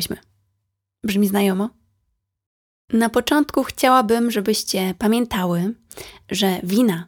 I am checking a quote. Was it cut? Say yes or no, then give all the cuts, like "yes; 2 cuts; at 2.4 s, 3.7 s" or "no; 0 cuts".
no; 0 cuts